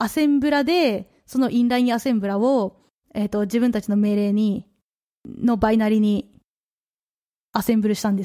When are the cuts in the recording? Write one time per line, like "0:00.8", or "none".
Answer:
none